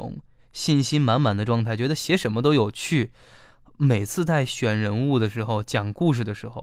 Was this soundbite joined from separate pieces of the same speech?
no; 0 cuts

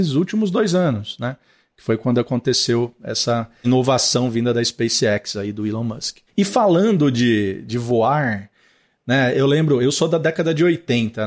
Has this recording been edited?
no; 0 cuts

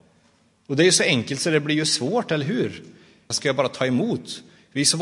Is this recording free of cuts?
no; 1 cut; at 3.3 s

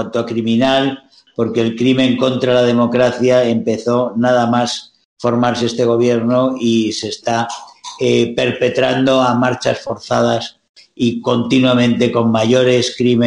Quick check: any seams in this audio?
no; 0 cuts

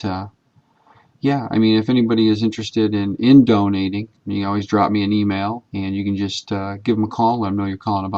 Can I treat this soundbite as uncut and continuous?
no; 2 cuts; at 4.1 s, 5.6 s

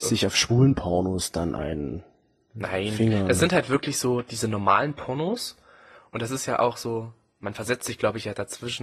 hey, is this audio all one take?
yes; 0 cuts

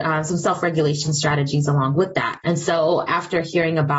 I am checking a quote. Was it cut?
yes; 1 cut; at 2.4 s

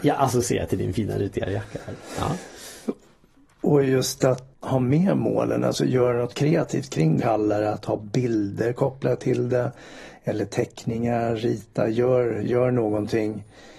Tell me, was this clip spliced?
yes; 2 cuts; at 4.5 s, 7.2 s

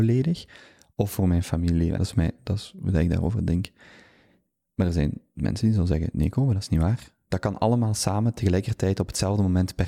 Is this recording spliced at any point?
yes; 1 cut; at 1.9 s

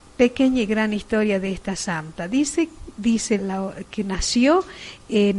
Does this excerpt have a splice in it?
yes; 1 cut; at 3.4 s

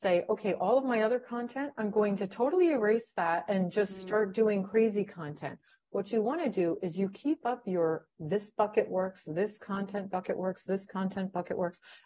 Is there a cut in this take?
no; 0 cuts

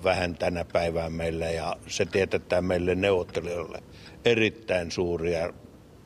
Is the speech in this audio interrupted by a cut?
no; 0 cuts

